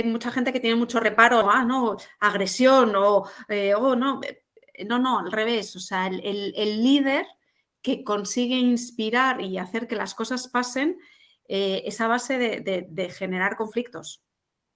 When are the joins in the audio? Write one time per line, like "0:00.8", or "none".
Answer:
0:01.4

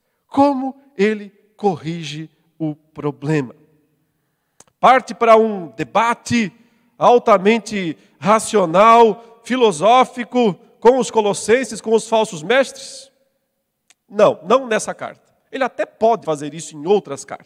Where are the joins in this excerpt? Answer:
0:16.2

